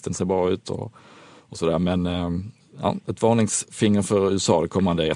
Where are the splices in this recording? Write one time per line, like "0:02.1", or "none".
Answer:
none